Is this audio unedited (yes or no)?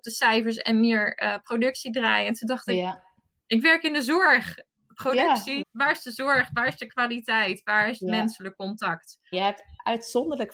no